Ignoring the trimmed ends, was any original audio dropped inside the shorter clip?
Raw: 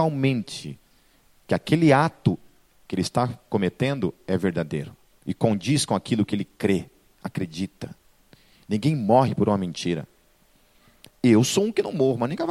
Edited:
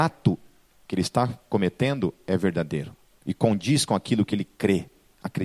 no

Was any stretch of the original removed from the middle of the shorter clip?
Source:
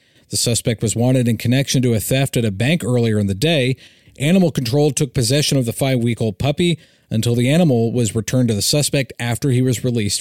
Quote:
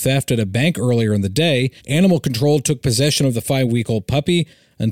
yes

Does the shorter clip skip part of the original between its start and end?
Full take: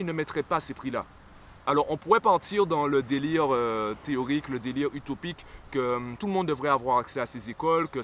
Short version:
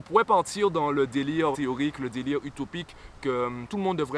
yes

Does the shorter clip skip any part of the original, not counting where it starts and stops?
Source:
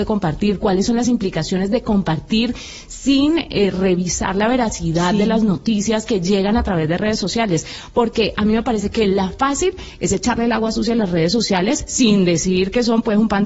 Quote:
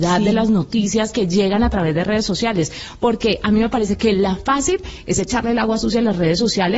no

